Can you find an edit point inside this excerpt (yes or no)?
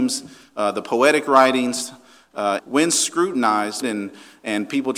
yes